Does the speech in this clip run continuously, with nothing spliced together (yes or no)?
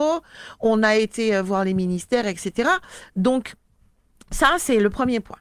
yes